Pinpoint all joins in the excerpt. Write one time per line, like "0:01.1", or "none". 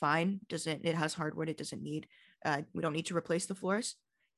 none

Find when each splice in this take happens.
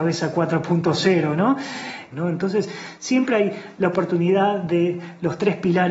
0:02.1

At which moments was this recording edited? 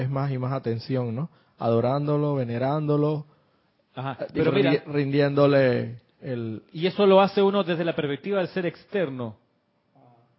none

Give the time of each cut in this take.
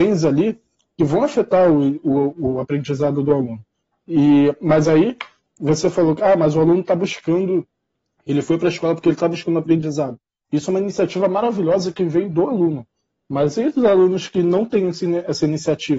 none

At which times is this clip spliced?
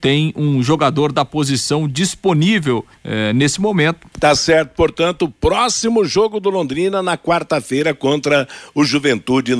0:02.9
0:04.1

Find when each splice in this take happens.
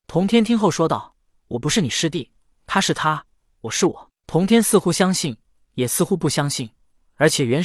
0:04.1

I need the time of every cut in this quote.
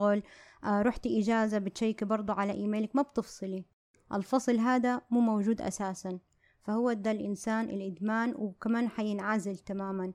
none

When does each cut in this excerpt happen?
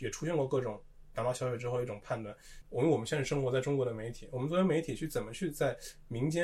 0:02.6

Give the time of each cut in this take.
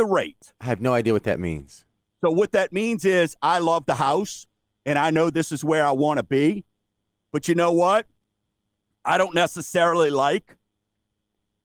none

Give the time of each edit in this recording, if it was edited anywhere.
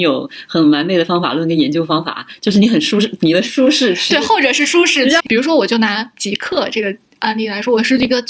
0:05.2

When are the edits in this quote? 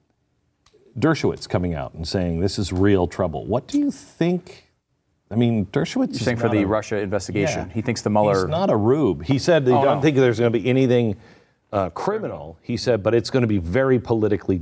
none

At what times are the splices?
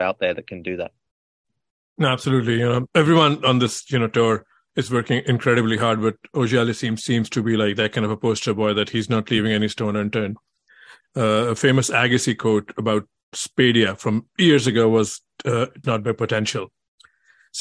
0:11.0
0:15.8

